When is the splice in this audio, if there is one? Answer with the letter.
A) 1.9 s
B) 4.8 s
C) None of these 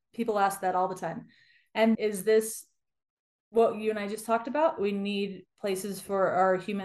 A